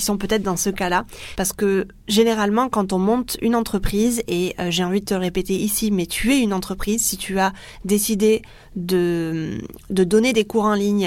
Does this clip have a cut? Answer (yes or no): yes